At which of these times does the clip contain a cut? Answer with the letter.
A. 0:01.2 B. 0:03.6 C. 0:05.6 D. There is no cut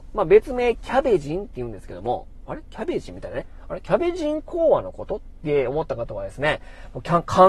D